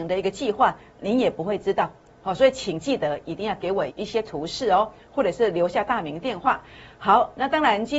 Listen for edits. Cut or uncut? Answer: cut